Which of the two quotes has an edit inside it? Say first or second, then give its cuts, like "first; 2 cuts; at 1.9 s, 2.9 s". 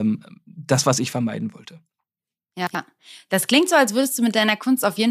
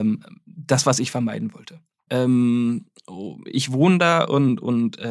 second; 2 cuts; at 2.1 s, 3.4 s